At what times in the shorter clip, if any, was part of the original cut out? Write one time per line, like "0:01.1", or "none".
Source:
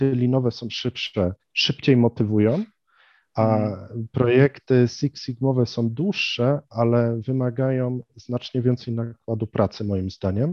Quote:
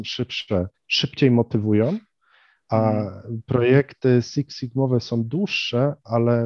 none